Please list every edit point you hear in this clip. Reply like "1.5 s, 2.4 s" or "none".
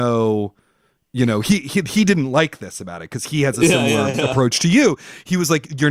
none